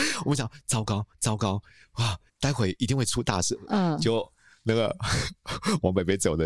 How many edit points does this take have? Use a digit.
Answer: 2